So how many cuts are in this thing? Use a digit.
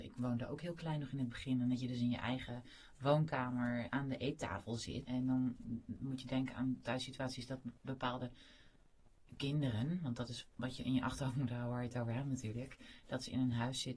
2